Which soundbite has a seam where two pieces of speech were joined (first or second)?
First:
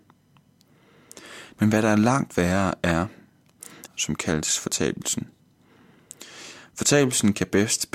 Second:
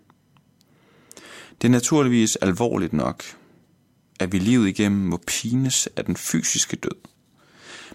first